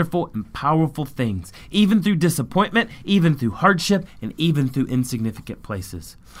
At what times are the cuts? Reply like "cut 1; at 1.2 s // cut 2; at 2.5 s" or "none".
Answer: none